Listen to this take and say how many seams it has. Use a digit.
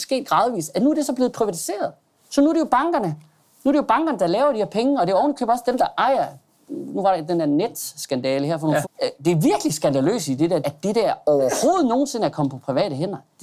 2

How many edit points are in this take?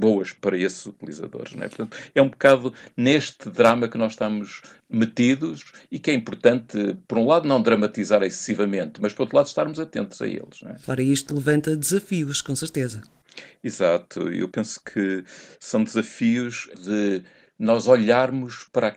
2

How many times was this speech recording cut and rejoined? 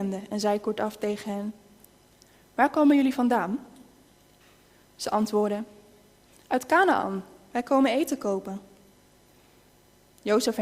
0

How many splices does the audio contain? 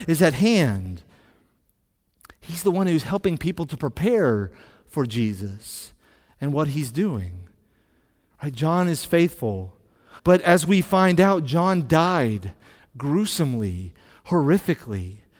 2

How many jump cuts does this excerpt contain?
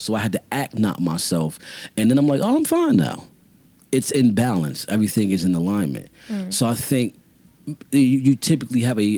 0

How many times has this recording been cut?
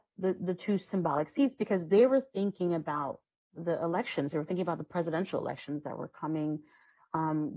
0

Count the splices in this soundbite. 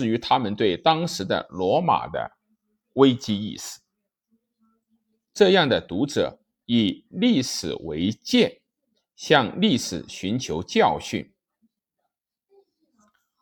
1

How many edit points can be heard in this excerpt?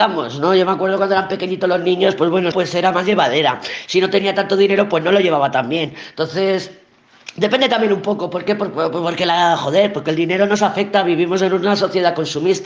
1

